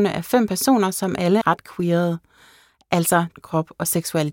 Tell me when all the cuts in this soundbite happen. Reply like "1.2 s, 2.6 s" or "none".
1.4 s, 3.3 s